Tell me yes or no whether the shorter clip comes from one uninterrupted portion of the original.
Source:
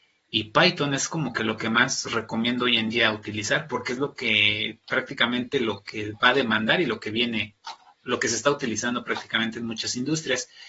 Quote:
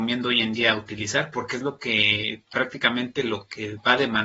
yes